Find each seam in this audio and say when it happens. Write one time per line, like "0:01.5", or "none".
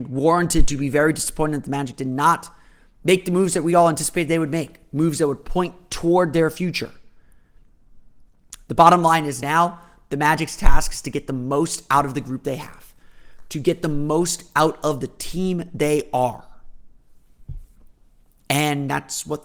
none